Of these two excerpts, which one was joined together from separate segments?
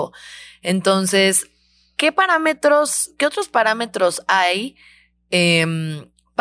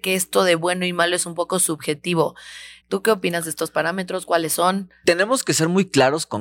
second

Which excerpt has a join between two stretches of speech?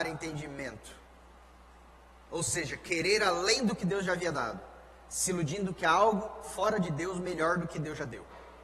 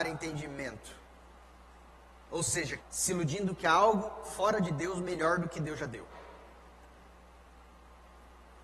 second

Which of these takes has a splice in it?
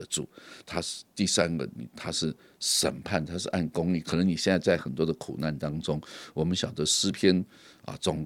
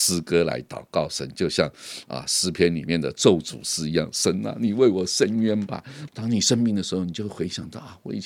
second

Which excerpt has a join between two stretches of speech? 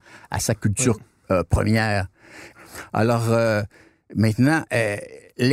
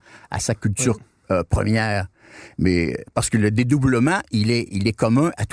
first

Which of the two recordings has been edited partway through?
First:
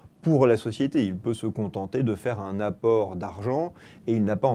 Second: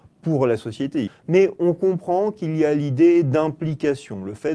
second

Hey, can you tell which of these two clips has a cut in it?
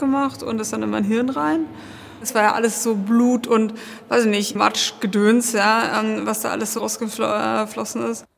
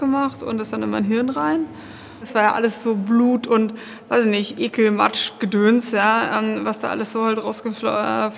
first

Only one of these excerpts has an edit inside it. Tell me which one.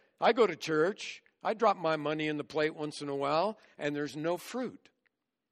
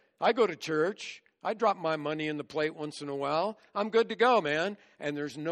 first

